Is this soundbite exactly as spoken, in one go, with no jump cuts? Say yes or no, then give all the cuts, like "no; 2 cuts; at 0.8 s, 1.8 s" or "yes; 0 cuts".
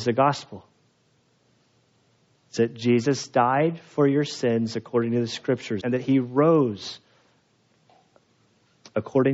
no; 1 cut; at 5.8 s